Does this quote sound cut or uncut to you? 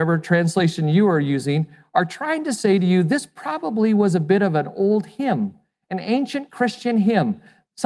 uncut